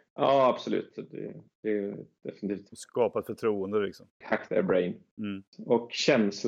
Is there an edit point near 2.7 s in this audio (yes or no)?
yes